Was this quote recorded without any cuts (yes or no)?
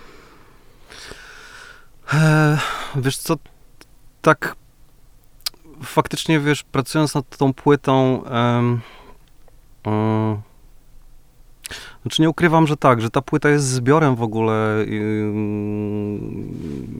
yes